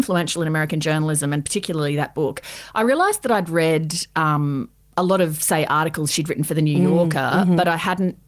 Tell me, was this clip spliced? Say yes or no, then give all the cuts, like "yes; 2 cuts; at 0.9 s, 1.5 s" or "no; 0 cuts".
no; 0 cuts